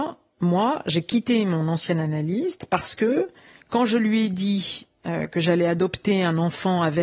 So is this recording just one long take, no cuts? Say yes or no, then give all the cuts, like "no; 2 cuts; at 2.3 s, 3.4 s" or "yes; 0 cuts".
yes; 0 cuts